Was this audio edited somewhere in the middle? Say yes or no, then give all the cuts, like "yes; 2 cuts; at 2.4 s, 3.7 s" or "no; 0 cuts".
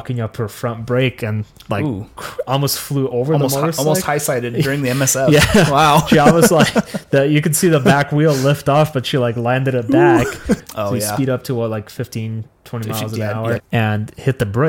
yes; 2 cuts; at 10.6 s, 13.6 s